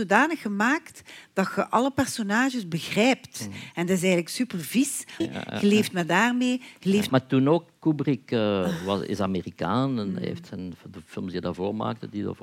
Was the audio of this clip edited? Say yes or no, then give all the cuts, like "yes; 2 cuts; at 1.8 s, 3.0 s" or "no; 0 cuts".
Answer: yes; 2 cuts; at 5.2 s, 7.1 s